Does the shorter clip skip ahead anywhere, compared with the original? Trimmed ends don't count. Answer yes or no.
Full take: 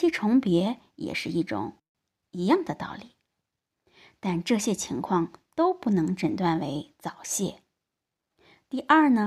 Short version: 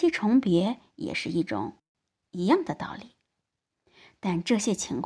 no